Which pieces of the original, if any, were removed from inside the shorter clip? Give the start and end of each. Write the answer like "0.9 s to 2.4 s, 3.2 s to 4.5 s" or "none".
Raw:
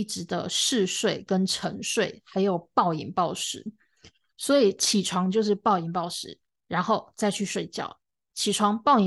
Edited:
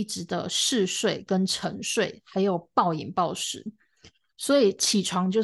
none